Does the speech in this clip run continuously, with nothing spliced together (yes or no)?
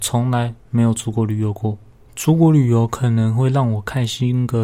yes